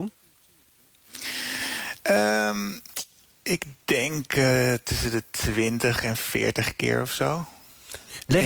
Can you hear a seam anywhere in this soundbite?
no; 0 cuts

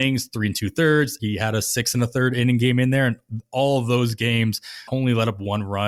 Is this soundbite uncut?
no; 1 cut; at 1.2 s

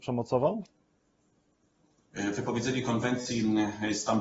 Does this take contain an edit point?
no; 0 cuts

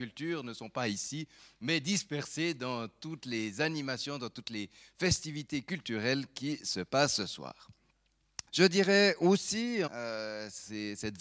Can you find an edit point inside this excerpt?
yes; 2 cuts; at 8.5 s, 9.9 s

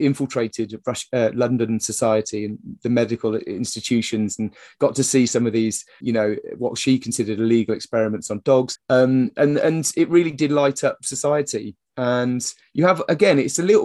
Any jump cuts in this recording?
yes; 2 cuts; at 6.0 s, 8.8 s

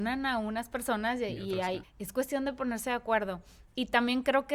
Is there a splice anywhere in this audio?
yes; 1 cut; at 1.8 s

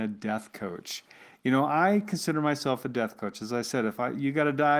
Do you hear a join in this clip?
no; 0 cuts

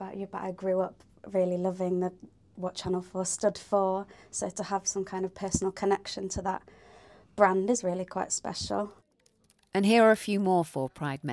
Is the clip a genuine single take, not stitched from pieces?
yes; 0 cuts

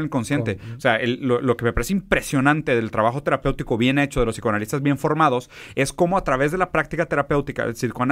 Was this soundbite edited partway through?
no; 0 cuts

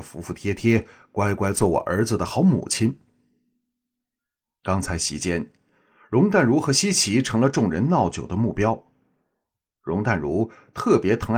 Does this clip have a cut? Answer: no; 0 cuts

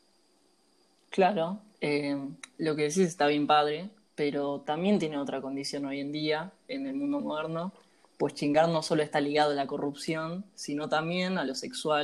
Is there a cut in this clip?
no; 0 cuts

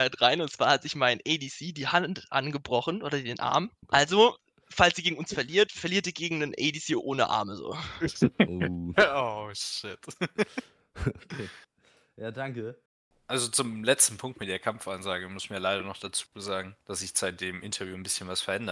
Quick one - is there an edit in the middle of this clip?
no; 0 cuts

